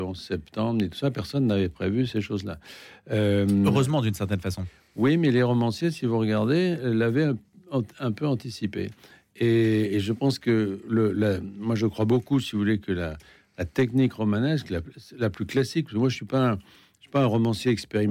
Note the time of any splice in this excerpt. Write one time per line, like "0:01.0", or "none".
none

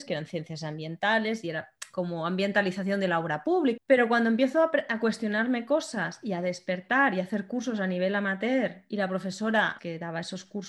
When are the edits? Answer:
0:03.8
0:09.8

